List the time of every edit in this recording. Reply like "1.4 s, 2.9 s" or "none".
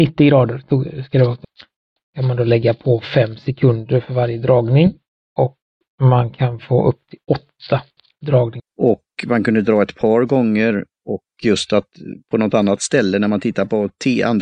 8.7 s